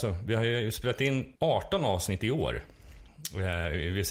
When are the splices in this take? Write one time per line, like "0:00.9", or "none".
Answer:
0:01.4